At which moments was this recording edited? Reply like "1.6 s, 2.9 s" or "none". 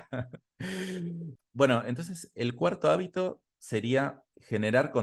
1.4 s